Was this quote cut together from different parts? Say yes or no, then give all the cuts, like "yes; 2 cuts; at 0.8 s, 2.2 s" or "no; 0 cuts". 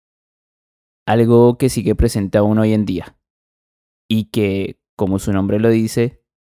no; 0 cuts